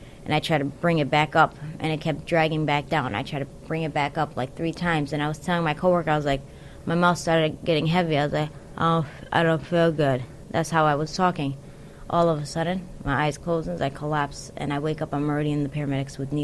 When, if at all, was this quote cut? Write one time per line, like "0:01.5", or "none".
none